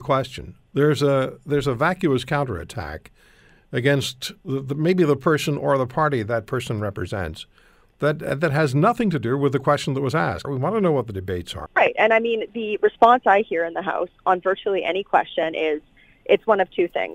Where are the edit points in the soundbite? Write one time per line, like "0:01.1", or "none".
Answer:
0:10.4
0:11.7